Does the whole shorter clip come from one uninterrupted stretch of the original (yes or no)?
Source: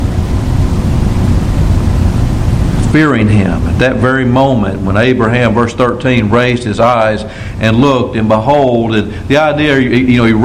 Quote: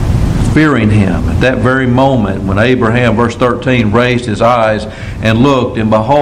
yes